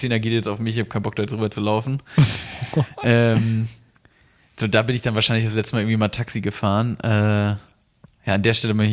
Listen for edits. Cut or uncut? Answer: uncut